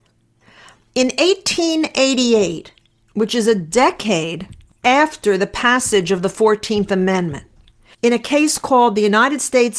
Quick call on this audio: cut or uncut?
cut